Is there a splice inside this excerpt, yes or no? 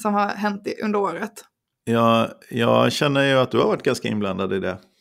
no